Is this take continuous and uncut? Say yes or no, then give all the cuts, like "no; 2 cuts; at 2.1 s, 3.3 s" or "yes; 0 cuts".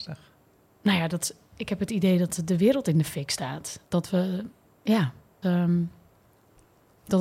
no; 2 cuts; at 3.9 s, 5.4 s